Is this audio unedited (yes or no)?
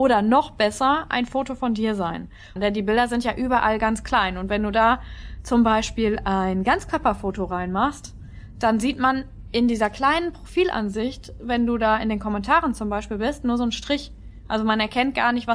no